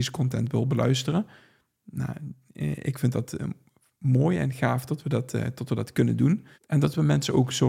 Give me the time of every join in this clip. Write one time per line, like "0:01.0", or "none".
0:06.5

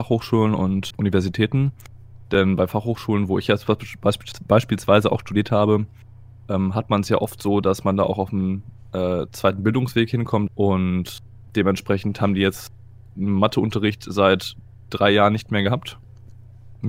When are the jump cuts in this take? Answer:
0:00.9
0:10.5

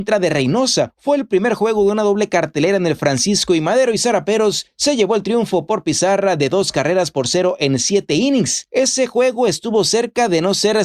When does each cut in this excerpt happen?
none

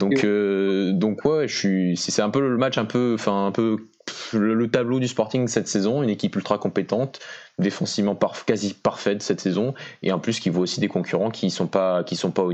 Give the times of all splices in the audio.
none

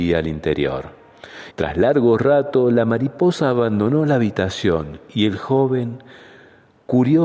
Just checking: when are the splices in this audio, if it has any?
0:01.5

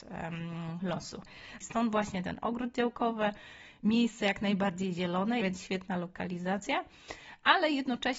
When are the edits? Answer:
0:01.6
0:05.4

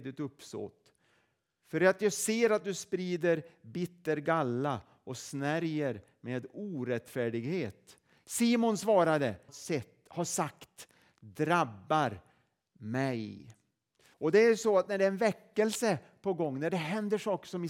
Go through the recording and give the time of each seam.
0:09.5
0:14.1

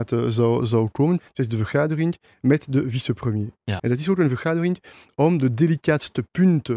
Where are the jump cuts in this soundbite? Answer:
0:01.2
0:03.8

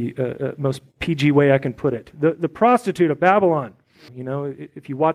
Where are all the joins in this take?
0:04.1

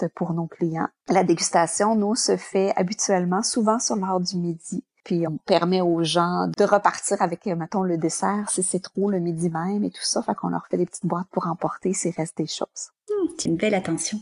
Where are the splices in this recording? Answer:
0:05.3

